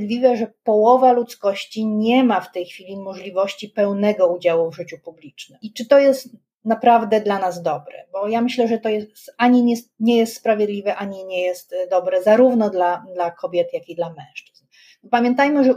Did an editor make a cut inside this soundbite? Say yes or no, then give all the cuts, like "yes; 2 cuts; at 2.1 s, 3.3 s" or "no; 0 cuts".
no; 0 cuts